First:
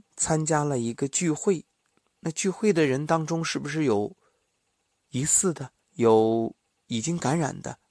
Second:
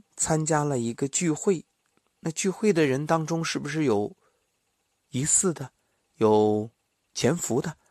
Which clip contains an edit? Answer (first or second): first